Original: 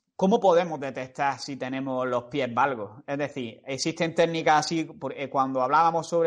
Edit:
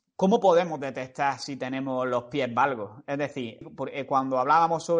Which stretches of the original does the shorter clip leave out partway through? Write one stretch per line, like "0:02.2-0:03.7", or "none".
0:03.6-0:04.8